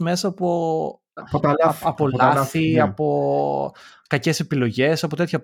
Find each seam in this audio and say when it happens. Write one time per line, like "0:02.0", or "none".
0:01.2